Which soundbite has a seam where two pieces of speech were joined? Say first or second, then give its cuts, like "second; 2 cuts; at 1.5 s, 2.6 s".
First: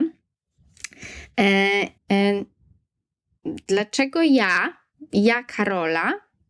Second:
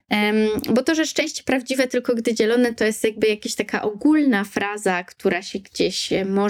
first; 1 cut; at 2.0 s